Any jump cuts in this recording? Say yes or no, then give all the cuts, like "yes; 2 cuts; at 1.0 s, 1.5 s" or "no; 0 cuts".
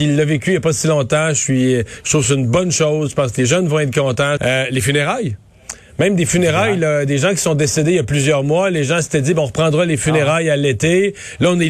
yes; 1 cut; at 4.4 s